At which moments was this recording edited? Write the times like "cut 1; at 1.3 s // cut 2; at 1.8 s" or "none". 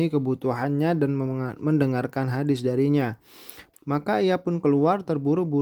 cut 1; at 3.7 s